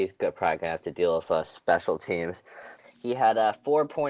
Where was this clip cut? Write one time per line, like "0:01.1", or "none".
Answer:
0:02.8